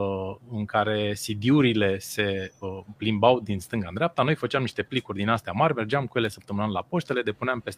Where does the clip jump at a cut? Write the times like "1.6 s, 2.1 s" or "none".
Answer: none